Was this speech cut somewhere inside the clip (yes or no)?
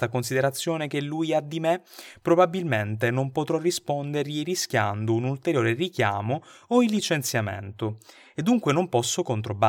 no